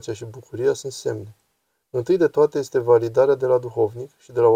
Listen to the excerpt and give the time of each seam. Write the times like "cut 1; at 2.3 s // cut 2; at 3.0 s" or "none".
none